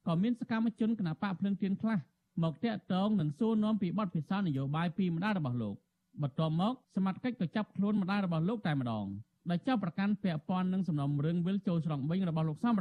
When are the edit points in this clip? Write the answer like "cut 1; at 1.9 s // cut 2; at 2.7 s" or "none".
cut 1; at 6.8 s